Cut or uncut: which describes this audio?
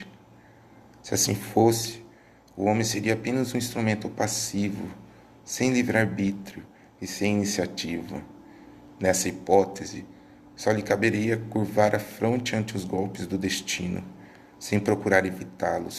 uncut